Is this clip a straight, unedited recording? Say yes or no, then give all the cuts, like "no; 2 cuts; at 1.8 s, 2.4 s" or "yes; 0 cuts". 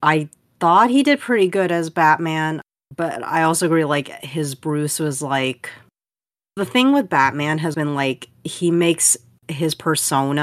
no; 1 cut; at 7.7 s